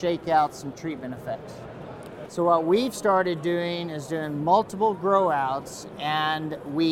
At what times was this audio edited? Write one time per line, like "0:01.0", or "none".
0:02.3